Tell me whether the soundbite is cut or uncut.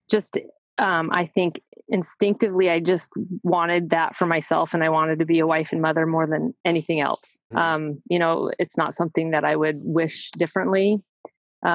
cut